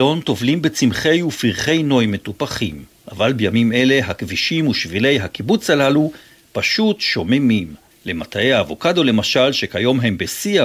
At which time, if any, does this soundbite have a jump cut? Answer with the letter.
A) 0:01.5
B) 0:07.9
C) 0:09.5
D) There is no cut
B